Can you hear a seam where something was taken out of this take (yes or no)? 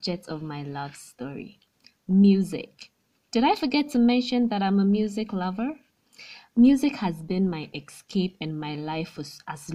no